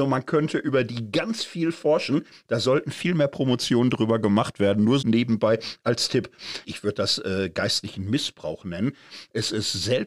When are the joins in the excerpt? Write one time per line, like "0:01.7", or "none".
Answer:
0:05.0
0:06.6